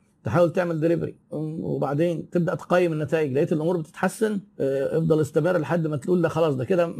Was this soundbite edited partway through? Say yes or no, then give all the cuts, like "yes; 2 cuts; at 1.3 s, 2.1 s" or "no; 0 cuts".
yes; 2 cuts; at 1.2 s, 4.5 s